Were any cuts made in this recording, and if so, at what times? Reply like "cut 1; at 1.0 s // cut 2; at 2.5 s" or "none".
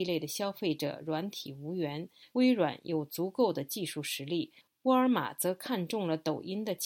cut 1; at 2.3 s